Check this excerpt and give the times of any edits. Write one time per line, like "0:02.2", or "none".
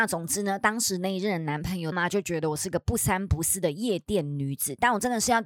0:01.9